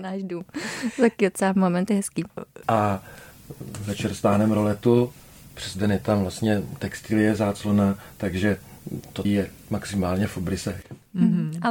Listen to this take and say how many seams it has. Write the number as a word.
two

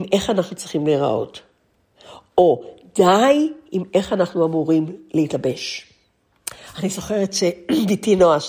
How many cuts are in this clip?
zero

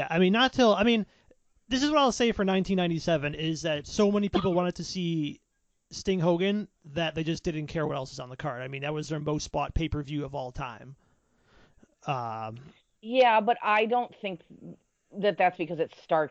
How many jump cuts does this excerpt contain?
zero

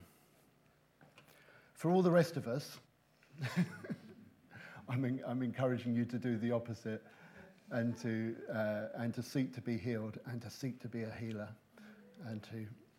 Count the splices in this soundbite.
one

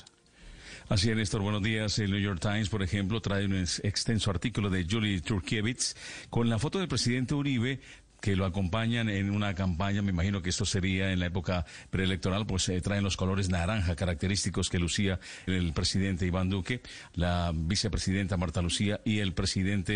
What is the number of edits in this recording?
two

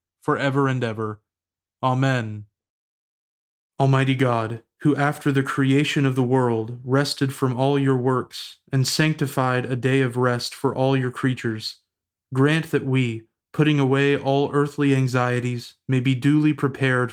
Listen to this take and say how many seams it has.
zero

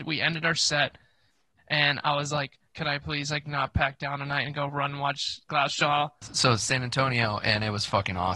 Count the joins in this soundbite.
two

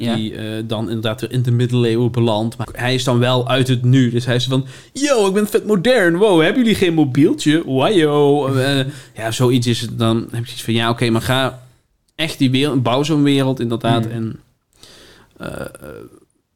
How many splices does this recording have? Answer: one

